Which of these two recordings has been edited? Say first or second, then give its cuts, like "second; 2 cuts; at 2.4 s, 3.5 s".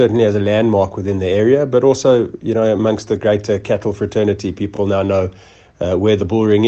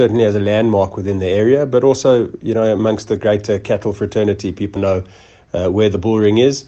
second; 1 cut; at 4.8 s